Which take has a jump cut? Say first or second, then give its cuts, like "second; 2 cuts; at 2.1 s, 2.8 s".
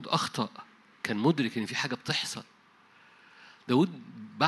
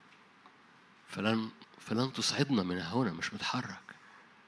second; 1 cut; at 1.6 s